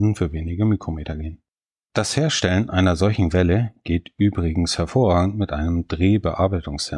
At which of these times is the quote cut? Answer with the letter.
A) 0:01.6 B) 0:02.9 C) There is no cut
C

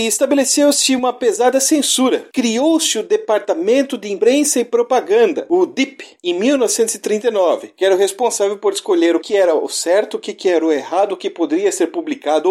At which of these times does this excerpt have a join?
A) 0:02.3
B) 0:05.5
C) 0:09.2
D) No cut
C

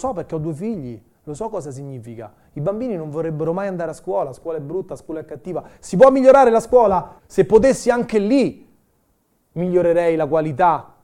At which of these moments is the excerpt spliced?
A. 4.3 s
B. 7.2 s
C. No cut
B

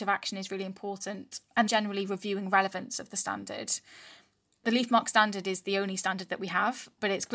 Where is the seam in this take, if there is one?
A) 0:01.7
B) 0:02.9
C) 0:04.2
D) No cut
A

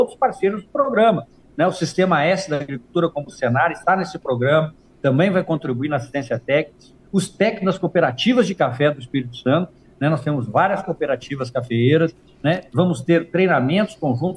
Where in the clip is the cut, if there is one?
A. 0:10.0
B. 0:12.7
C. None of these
C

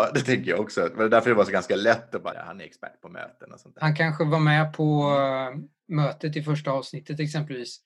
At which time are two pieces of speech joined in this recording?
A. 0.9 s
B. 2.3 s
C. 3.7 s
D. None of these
B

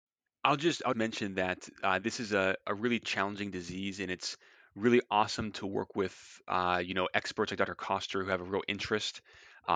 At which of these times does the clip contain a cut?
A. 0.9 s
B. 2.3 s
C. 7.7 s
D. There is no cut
A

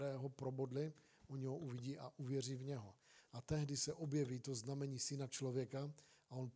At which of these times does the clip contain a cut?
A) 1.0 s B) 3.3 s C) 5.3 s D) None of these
B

